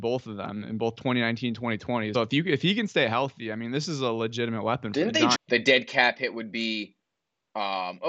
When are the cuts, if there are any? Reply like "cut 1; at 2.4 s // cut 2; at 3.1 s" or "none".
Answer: cut 1; at 2.1 s // cut 2; at 5.3 s